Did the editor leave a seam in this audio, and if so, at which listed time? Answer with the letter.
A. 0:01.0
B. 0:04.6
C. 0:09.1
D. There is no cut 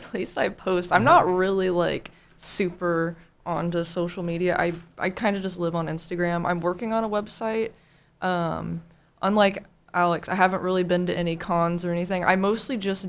D